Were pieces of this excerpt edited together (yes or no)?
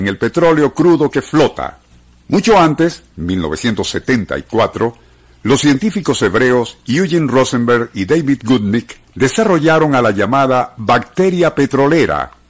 yes